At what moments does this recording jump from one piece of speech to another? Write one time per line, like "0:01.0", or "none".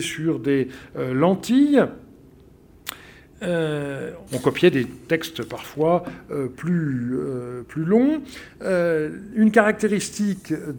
0:04.3